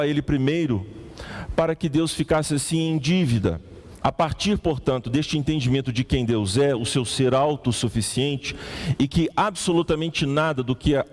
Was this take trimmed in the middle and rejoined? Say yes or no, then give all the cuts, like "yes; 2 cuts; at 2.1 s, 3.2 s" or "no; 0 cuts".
yes; 1 cut; at 4.0 s